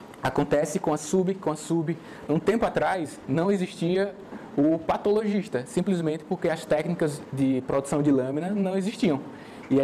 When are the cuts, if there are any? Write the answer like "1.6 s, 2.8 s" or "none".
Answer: 2.3 s